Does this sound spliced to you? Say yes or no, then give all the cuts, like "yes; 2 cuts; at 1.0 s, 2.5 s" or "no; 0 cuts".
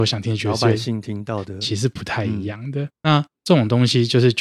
yes; 1 cut; at 2.9 s